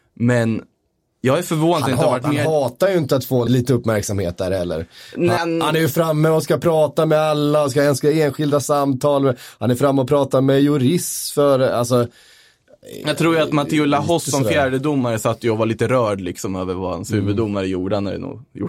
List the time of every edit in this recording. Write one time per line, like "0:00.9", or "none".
0:03.5
0:05.4